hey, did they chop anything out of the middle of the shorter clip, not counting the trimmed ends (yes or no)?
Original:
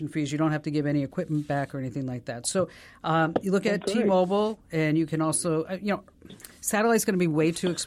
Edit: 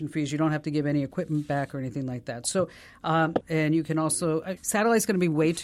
yes